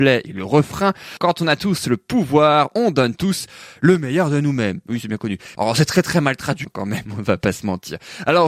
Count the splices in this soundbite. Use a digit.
3